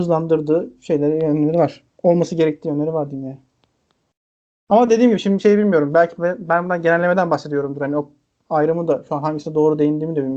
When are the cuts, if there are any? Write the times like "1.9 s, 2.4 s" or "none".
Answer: none